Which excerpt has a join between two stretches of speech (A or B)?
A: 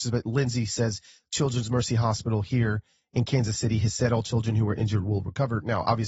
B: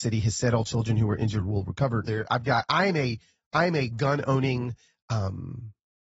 B